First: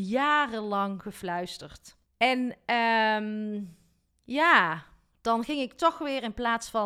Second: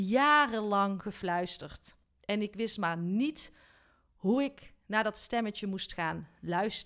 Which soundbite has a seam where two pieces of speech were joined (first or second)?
first